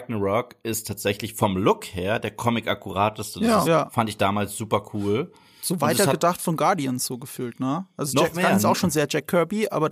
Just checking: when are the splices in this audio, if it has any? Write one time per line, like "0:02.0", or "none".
0:03.6